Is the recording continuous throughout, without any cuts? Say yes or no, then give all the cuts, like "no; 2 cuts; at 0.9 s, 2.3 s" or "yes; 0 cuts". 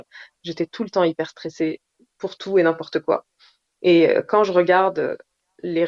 yes; 0 cuts